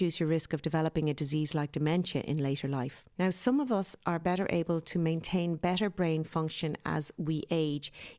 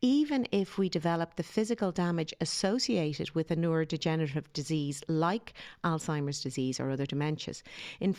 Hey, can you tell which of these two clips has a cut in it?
first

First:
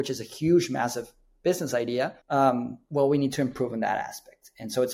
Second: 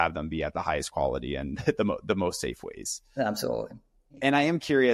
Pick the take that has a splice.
first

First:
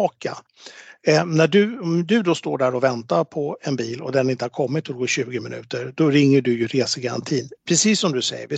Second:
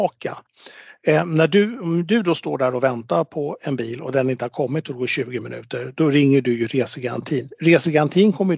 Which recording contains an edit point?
first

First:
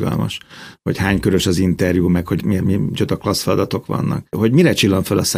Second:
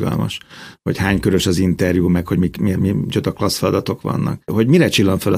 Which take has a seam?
first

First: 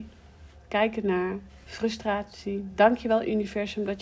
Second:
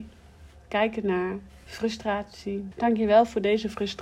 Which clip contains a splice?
second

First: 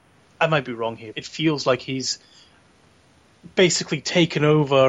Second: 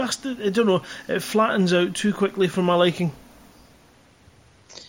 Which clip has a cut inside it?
first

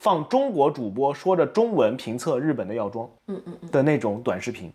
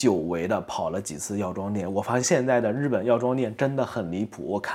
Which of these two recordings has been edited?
second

